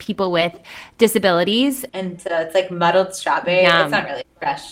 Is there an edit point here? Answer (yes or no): yes